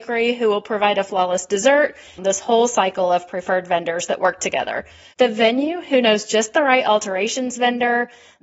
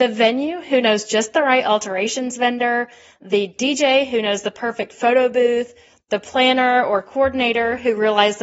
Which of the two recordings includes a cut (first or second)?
first